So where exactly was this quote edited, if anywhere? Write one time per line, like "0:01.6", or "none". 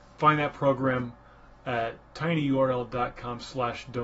none